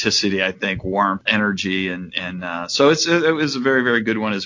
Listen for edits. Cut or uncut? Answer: cut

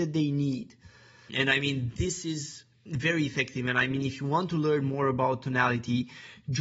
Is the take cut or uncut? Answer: uncut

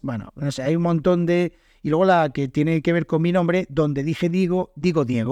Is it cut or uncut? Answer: uncut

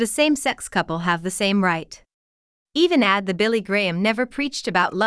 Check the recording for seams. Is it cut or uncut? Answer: cut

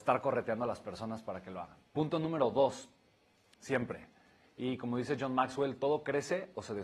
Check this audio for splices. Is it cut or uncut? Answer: cut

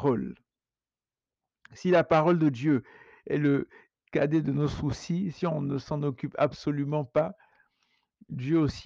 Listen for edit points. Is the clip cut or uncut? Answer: uncut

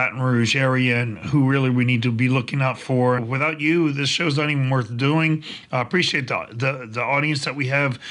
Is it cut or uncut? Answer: cut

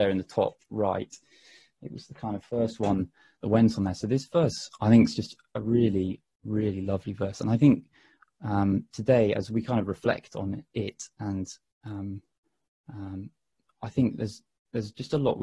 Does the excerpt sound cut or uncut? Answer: uncut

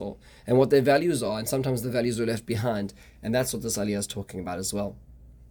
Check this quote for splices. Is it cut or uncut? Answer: uncut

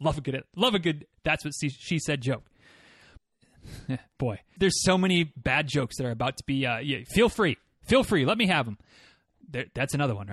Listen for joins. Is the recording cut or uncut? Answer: cut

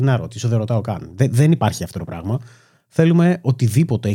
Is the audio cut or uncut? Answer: uncut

